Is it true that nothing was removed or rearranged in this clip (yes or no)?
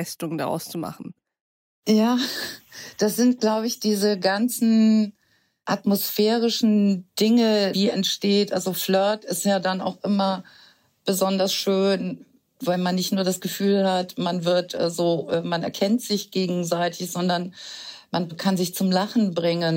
no